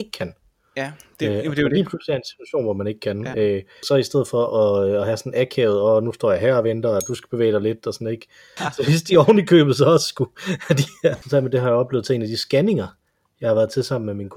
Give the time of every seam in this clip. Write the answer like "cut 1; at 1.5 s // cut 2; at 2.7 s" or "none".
cut 1; at 3.8 s // cut 2; at 8.6 s // cut 3; at 11.2 s

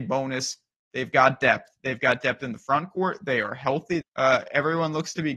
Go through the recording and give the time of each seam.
cut 1; at 4.0 s

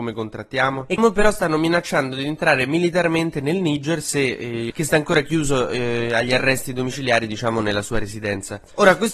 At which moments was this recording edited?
cut 1; at 1.0 s // cut 2; at 4.7 s

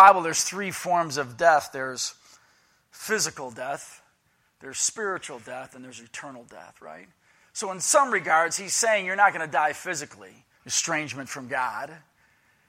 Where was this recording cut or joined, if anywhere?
cut 1; at 10.5 s

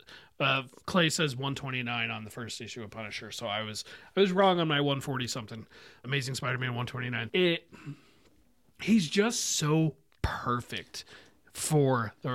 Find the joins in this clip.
cut 1; at 6.0 s // cut 2; at 7.3 s

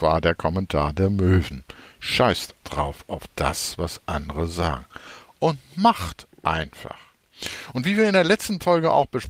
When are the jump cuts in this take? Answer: cut 1; at 2.6 s

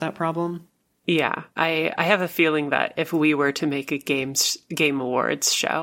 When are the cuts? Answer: cut 1; at 1.6 s

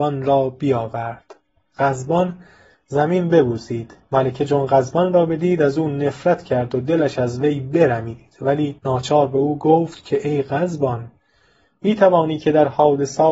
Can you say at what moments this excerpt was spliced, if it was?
cut 1; at 8.8 s

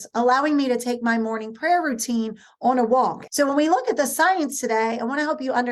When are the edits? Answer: cut 1; at 3.3 s

